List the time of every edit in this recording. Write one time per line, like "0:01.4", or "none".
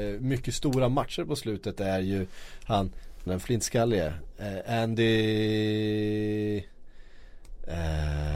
0:03.3